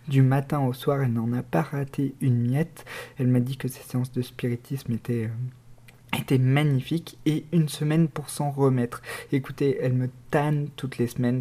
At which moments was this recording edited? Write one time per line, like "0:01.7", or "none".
none